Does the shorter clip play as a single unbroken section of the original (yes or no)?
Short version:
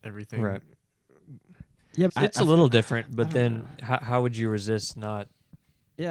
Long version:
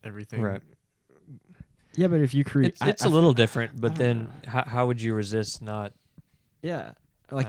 no